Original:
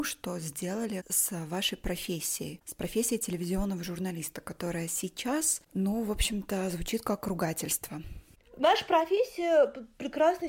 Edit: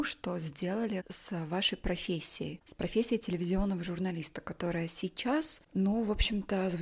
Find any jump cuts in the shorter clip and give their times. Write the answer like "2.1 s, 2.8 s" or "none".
none